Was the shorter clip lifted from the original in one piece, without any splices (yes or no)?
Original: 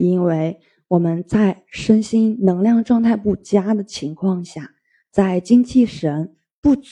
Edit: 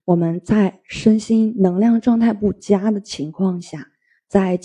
yes